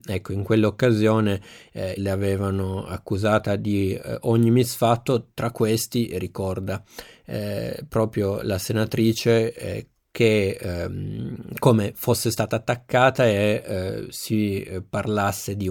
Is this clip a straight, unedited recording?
no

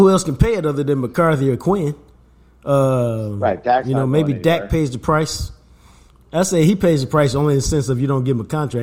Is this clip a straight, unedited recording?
yes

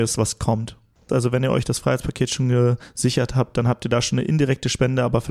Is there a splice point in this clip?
yes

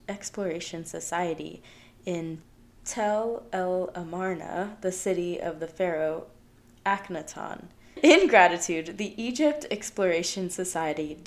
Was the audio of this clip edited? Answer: no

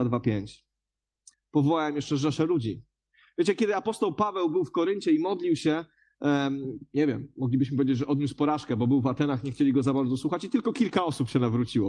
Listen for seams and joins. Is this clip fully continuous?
no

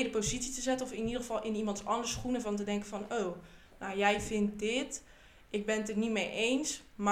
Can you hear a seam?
no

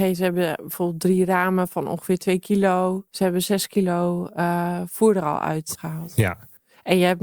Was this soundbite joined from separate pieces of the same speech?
yes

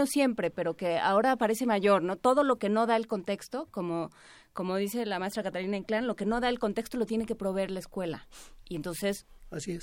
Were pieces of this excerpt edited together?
no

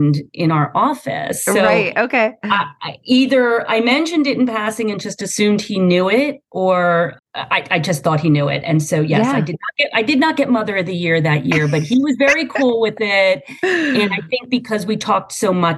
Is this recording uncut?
yes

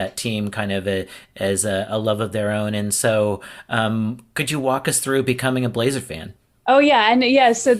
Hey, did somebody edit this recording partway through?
no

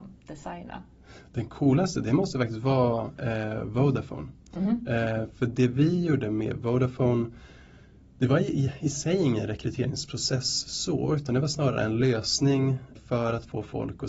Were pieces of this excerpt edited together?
yes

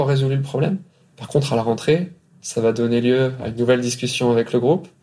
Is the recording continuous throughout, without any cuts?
yes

